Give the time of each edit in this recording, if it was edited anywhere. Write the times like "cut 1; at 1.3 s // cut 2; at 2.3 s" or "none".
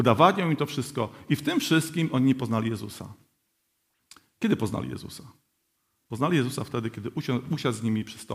none